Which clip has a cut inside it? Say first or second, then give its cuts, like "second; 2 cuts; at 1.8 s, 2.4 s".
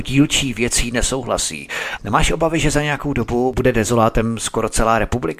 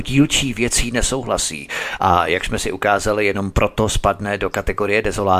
first; 1 cut; at 2.0 s